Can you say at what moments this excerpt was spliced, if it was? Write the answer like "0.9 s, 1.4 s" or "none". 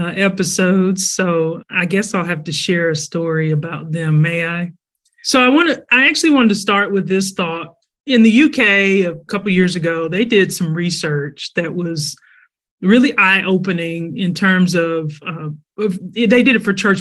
none